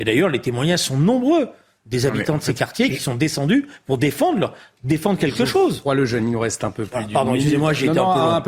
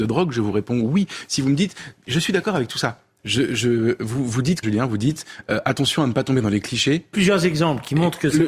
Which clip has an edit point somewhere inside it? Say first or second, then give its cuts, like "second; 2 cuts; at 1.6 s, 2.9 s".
second; 3 cuts; at 3.2 s, 4.6 s, 7.1 s